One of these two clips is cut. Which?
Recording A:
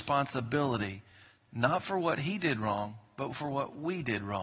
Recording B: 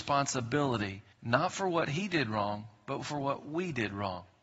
B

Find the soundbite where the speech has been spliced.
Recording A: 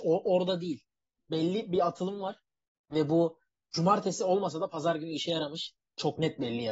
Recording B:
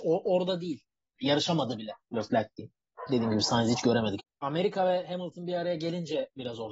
B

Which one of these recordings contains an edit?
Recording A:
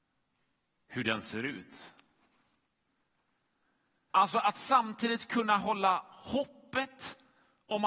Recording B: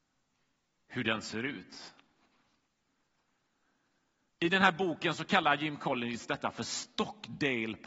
A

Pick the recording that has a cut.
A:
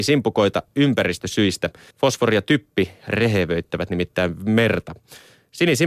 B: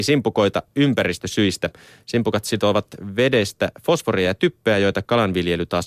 A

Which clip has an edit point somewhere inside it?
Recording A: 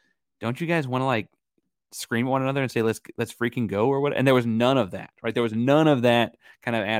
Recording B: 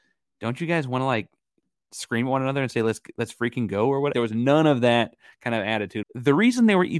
B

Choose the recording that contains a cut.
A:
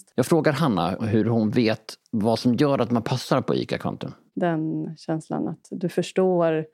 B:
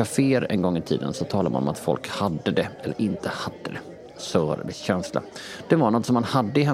A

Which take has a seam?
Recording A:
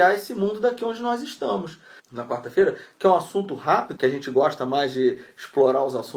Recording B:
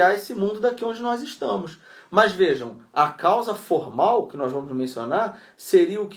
A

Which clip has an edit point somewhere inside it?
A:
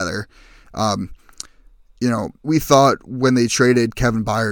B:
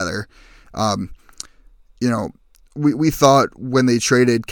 A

